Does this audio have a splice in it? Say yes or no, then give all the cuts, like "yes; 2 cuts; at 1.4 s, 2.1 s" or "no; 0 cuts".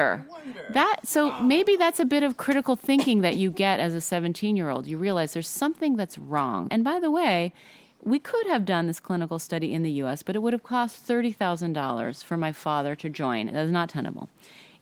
yes; 2 cuts; at 6.7 s, 13.5 s